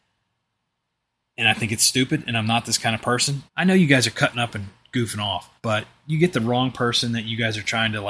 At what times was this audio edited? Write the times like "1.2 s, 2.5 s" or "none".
3.5 s, 5.6 s

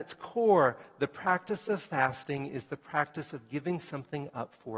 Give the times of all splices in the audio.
none

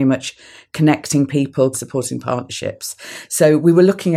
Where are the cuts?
1.7 s

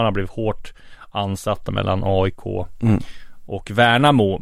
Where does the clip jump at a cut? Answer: 1.7 s

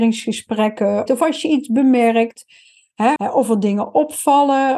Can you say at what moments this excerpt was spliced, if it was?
1.1 s, 3.2 s

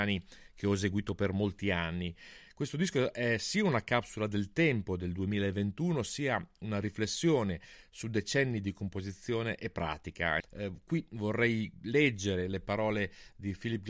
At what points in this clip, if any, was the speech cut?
10.4 s

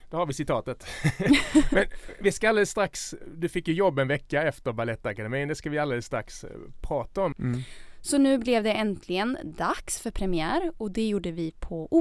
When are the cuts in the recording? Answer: 7.3 s

